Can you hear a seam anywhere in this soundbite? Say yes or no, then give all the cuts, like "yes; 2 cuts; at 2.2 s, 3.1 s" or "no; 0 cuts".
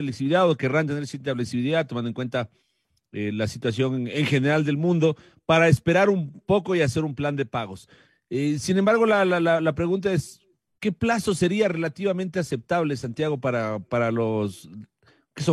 no; 0 cuts